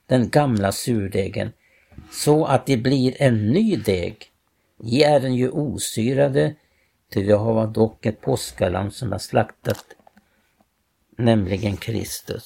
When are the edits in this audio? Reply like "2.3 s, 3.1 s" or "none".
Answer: none